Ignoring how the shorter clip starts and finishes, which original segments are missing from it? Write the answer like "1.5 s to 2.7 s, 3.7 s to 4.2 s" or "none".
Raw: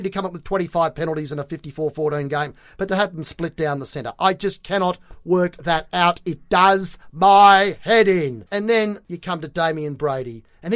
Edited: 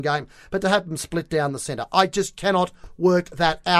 none

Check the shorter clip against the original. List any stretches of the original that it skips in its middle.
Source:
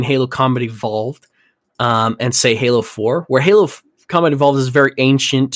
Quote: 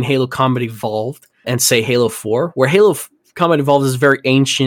1.4 s to 2.2 s

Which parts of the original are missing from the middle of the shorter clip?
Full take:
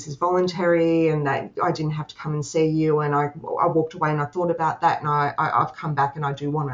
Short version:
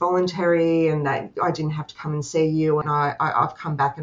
3.0 s to 5.0 s

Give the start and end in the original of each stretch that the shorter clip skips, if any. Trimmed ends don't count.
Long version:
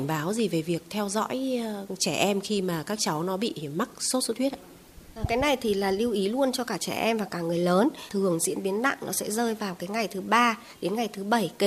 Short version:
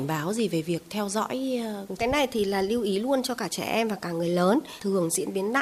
2.0 s to 5.3 s

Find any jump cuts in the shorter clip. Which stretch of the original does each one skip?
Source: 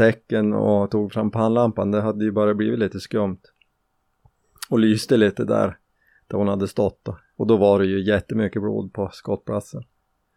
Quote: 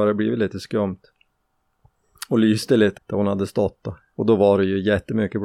5.4 s to 6.2 s

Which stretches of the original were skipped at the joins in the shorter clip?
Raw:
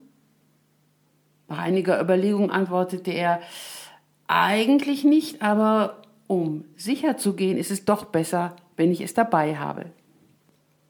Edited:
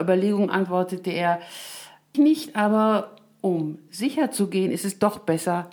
4.2 s to 5.0 s

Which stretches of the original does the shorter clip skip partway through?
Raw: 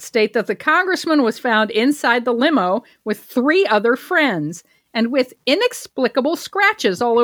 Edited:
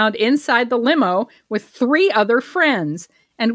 none

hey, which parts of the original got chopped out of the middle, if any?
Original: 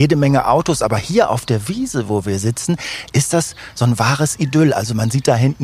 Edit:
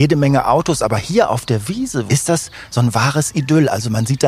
2.1 s to 3.1 s

